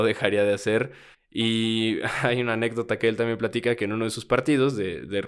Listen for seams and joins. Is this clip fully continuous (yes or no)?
no